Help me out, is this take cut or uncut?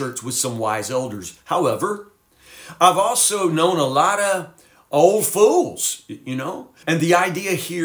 cut